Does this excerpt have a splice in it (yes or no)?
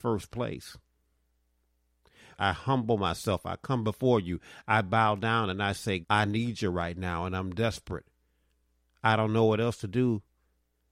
yes